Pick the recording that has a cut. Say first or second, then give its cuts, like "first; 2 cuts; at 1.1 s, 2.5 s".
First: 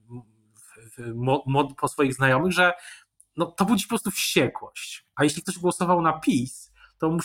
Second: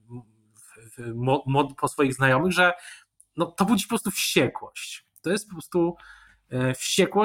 first; 1 cut; at 5.1 s